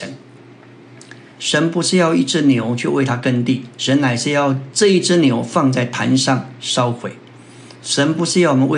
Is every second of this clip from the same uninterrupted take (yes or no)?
no